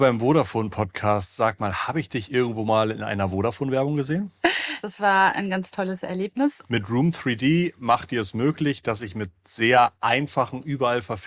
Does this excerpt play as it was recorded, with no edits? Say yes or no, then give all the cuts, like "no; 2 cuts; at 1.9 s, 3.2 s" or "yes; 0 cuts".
no; 2 cuts; at 4.8 s, 6.6 s